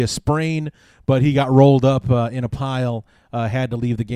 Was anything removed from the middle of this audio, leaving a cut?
no; 0 cuts

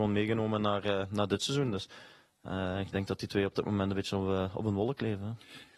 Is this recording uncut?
yes; 0 cuts

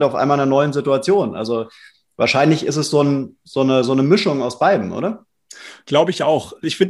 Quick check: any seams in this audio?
no; 0 cuts

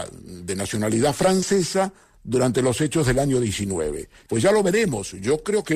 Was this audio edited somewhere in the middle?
yes; 1 cut; at 4.3 s

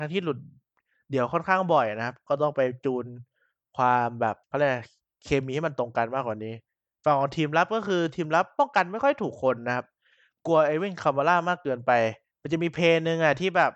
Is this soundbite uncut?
no; 1 cut; at 4.4 s

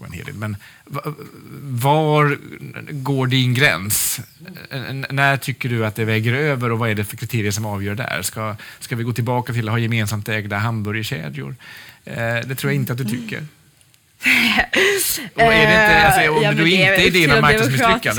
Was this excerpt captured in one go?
yes; 0 cuts

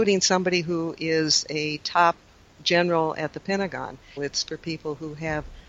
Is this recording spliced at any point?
yes; 1 cut; at 4.2 s

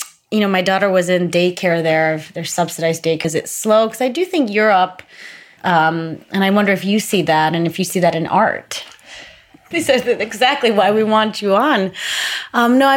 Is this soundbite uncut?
no; 3 cuts; at 3.2 s, 5.6 s, 9.7 s

